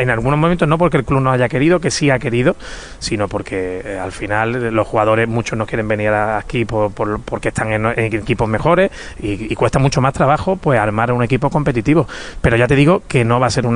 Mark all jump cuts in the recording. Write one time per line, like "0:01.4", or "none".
none